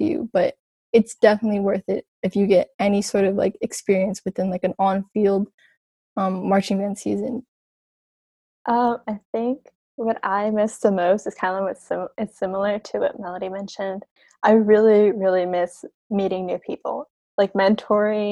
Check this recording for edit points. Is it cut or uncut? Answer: uncut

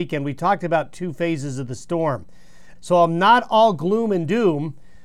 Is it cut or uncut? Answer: cut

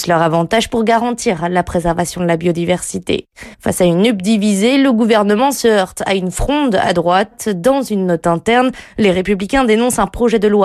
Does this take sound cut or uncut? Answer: cut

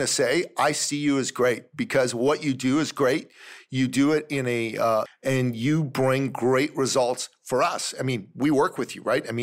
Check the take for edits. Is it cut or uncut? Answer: cut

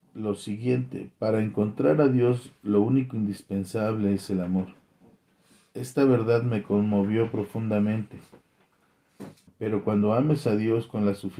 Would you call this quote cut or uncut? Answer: cut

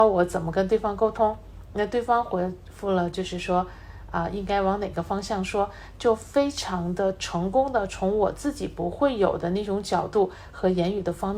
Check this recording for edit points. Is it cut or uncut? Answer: uncut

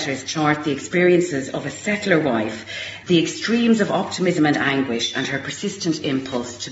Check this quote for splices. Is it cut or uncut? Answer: cut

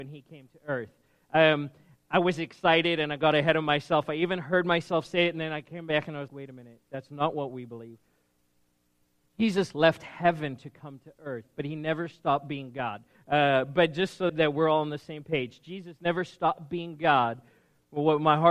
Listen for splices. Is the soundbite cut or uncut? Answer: cut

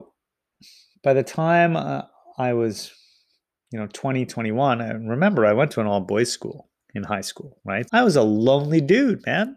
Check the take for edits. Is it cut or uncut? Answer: cut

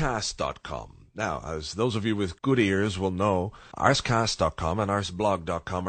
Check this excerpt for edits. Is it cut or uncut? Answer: cut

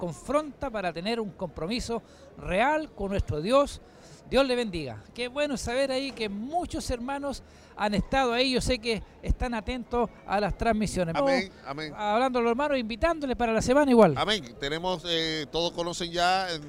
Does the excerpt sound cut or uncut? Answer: cut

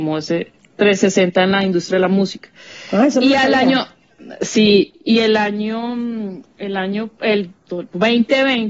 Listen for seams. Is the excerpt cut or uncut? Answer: uncut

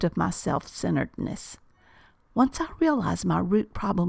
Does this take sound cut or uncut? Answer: uncut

